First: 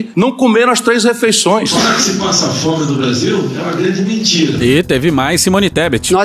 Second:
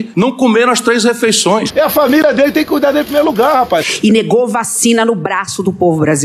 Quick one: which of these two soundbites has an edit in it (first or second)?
second